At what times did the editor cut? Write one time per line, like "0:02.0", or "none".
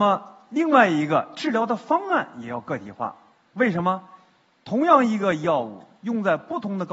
none